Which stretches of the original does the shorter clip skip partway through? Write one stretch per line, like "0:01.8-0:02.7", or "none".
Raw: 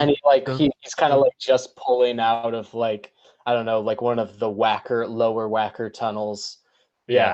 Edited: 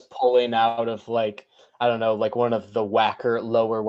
none